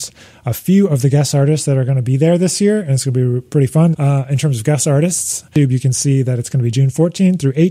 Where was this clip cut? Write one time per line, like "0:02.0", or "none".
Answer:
0:03.9